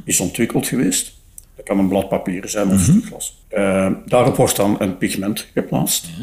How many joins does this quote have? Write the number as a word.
two